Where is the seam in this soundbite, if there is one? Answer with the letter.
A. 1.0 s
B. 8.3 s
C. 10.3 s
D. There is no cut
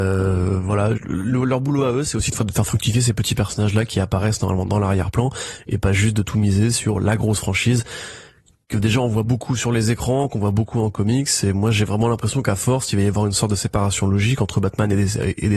A